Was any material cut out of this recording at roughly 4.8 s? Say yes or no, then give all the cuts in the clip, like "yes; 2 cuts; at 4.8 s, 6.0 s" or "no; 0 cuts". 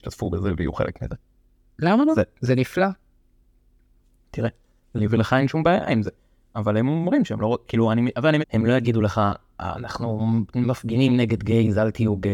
no; 1 cut; at 8.4 s